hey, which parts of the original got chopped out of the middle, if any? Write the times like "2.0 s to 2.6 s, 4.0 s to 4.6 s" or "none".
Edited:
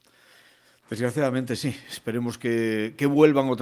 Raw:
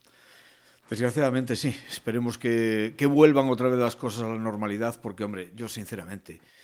none